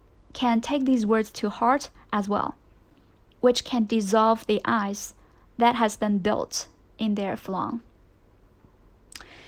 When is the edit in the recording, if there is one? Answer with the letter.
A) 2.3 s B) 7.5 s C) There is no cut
B